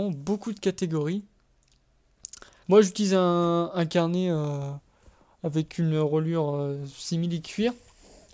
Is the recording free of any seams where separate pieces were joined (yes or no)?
no